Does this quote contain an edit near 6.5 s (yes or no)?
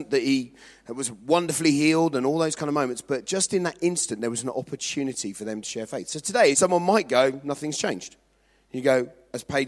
yes